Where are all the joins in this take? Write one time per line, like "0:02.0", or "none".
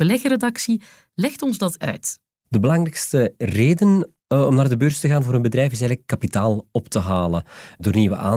0:01.8